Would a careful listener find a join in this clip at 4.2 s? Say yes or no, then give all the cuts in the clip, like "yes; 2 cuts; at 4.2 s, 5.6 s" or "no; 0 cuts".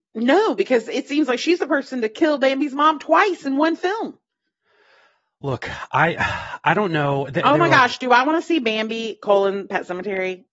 no; 0 cuts